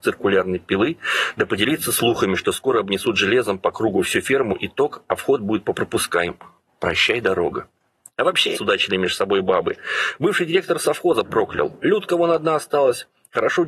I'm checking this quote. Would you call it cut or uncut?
cut